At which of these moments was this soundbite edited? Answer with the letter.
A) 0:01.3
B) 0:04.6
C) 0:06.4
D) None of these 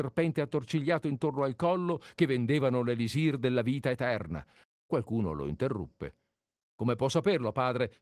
B